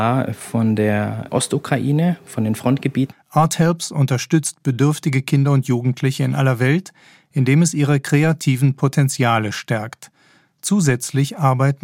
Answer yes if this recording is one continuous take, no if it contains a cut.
no